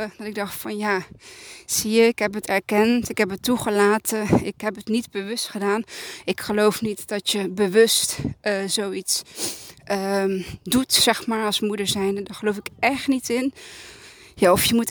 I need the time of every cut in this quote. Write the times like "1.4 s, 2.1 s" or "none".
none